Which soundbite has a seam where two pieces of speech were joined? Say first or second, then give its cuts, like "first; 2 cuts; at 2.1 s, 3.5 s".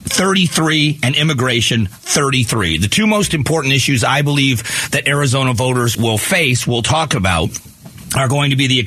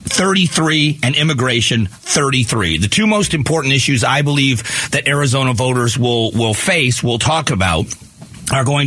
first; 1 cut; at 5.9 s